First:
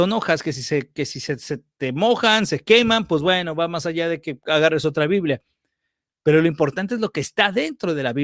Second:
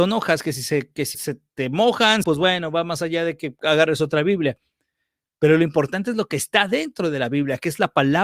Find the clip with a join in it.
second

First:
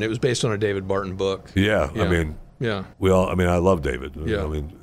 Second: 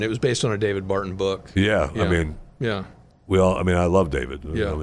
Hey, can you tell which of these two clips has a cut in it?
first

